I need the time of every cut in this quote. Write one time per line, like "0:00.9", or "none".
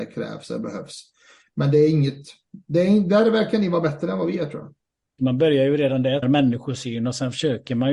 0:05.2
0:06.2